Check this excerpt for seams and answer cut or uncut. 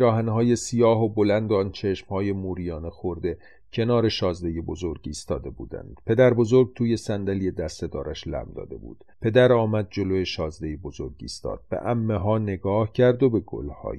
cut